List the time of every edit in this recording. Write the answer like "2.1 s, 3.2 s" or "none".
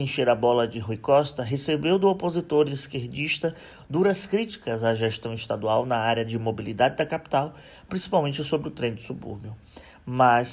none